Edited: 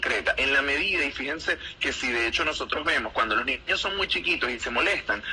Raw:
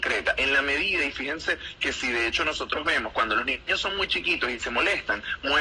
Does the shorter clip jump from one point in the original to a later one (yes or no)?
no